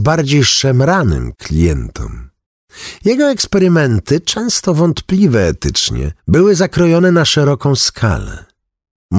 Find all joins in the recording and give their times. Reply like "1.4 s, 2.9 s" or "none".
6.2 s